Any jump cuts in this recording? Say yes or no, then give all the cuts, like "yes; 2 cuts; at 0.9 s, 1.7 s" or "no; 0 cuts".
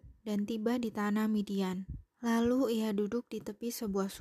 yes; 1 cut; at 2.1 s